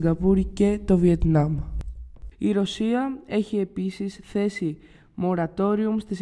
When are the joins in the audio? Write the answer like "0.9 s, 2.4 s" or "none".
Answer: 2.3 s